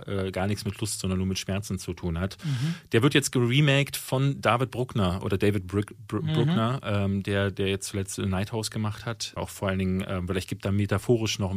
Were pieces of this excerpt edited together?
yes; 1 cut; at 9.4 s

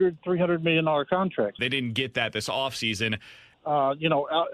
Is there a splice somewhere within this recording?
yes; 2 cuts; at 1.6 s, 3.5 s

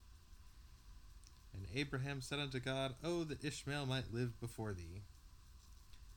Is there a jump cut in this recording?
no; 0 cuts

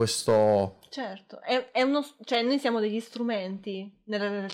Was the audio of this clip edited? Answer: no; 0 cuts

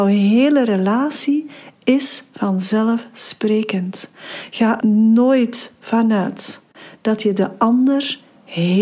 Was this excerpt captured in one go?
no; 1 cut; at 4.8 s

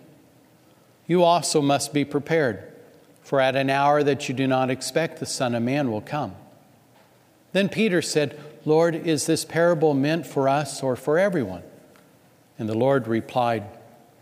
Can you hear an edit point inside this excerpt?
no; 0 cuts

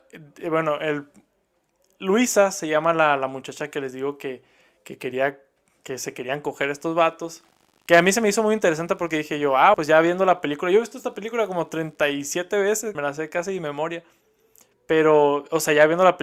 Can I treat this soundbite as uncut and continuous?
no; 3 cuts; at 7.7 s, 9.7 s, 13.0 s

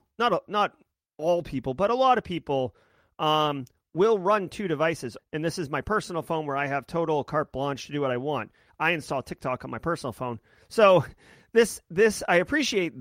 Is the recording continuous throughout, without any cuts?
no; 1 cut; at 5.2 s

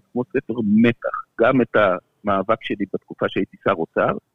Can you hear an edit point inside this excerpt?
no; 0 cuts

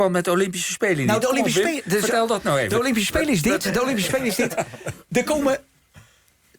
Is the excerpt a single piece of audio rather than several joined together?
yes; 0 cuts

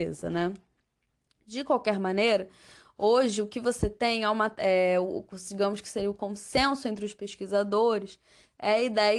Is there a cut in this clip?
no; 0 cuts

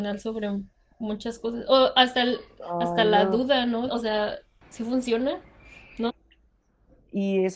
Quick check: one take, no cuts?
no; 2 cuts; at 3.9 s, 6.1 s

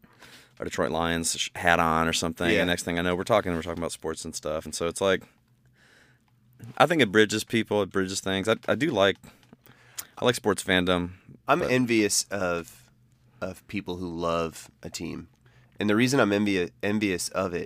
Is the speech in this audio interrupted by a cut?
no; 0 cuts

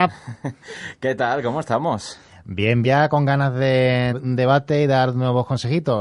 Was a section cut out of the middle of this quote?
yes; 2 cuts; at 2.8 s, 4.1 s

